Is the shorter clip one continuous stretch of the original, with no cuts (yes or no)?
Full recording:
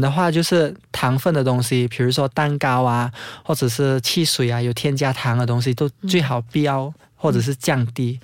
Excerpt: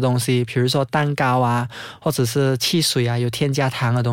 yes